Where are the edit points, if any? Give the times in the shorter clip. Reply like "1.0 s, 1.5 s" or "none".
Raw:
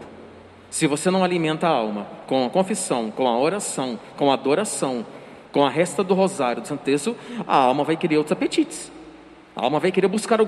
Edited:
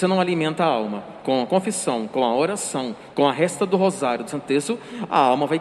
3.1 s

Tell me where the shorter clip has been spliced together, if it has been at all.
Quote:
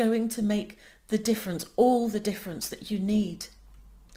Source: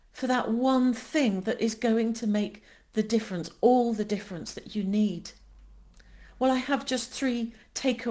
none

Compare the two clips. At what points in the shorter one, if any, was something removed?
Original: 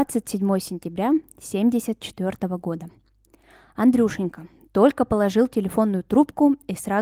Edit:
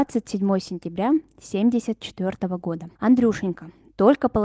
2.9 s

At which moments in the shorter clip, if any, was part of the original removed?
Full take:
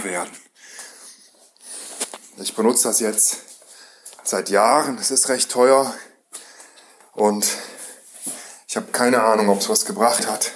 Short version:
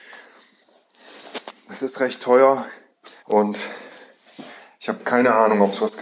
1.7 s, 3.2 s

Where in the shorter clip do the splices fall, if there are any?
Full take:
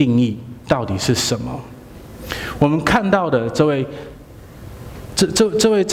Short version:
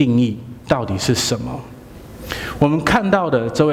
none

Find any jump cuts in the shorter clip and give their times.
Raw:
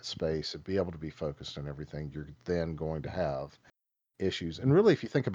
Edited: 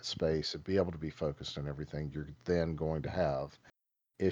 none

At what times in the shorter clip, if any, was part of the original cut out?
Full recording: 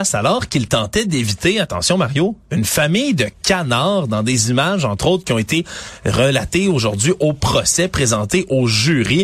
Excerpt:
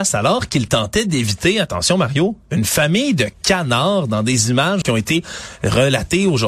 4.8 s

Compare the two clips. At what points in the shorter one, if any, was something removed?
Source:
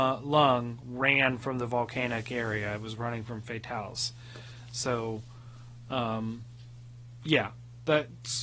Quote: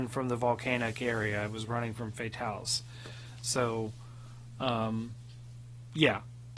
none

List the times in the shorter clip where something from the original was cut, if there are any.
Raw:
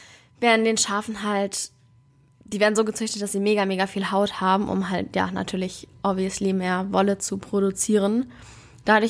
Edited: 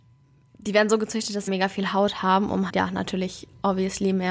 1.5 s, 2.7 s

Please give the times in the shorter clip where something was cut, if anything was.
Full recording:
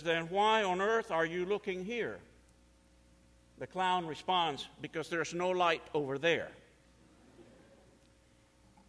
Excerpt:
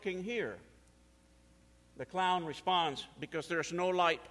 none

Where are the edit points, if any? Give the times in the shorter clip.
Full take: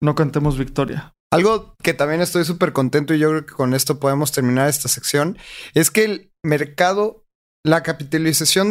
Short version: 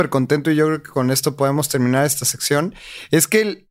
none

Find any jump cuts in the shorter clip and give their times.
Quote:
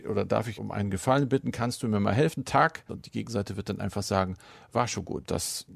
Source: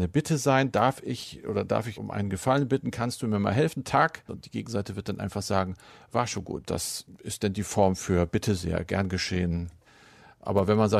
none

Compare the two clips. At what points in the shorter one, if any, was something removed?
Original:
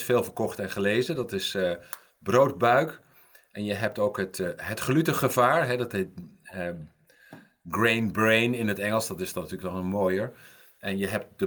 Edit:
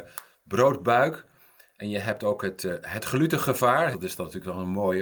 3.9 s

